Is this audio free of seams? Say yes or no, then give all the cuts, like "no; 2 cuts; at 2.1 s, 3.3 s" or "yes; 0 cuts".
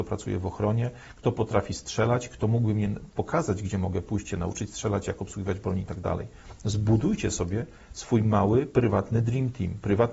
yes; 0 cuts